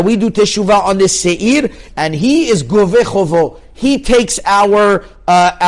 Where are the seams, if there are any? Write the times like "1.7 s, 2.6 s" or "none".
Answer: 1.9 s